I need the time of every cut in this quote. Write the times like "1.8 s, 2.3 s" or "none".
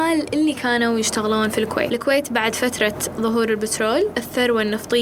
none